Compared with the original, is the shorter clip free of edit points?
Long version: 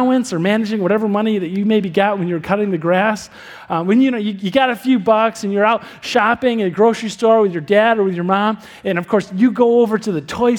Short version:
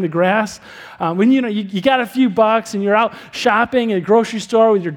yes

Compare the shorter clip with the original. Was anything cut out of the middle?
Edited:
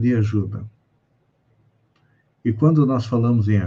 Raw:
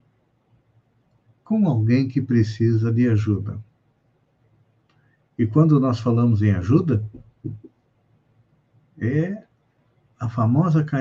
no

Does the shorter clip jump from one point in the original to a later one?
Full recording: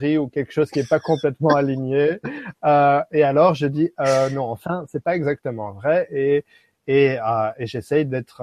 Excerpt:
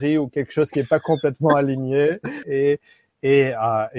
yes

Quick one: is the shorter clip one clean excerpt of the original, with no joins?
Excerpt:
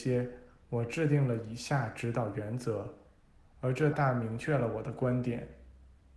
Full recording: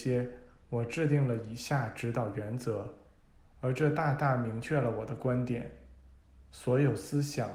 no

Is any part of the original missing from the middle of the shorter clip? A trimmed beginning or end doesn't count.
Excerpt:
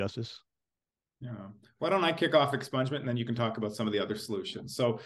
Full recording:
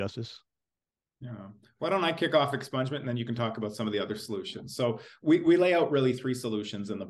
no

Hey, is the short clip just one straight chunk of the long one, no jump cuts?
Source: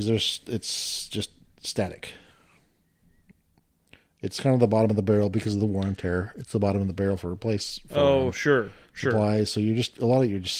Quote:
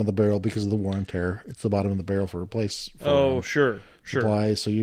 yes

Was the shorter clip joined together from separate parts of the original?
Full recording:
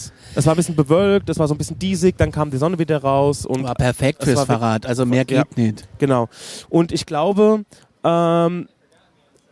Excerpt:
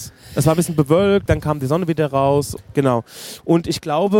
yes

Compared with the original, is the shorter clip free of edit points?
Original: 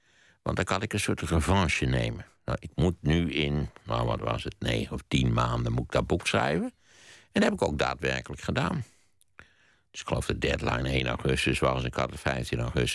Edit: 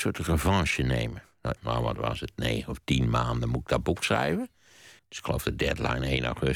no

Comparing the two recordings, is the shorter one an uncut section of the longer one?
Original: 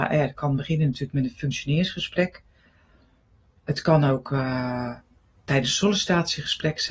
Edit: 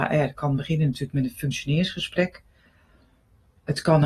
yes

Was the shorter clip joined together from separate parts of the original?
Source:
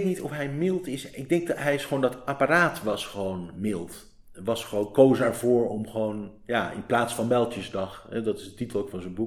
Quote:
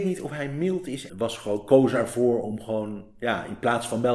yes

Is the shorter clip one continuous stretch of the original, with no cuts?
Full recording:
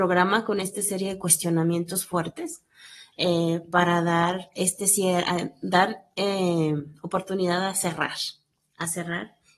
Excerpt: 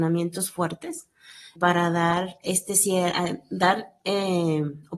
no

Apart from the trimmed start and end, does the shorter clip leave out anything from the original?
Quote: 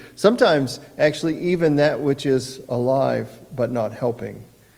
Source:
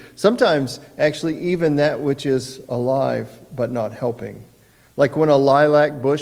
no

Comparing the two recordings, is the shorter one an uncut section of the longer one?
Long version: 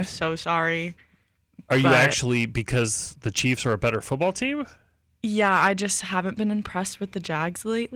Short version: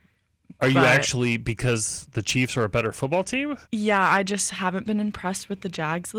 no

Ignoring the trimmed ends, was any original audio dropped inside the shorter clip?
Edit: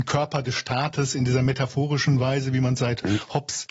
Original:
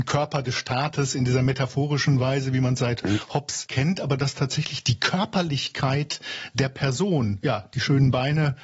no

